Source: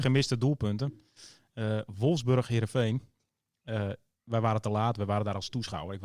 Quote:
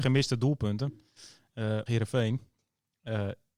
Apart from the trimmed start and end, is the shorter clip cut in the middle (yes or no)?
yes